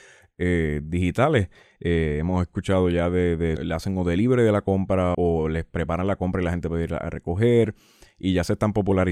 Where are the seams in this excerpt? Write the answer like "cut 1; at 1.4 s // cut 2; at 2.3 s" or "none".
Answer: cut 1; at 3.6 s // cut 2; at 5.1 s